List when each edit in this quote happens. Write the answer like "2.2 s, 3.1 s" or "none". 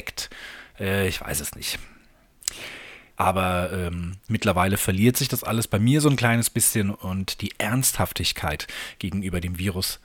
3.1 s, 4.3 s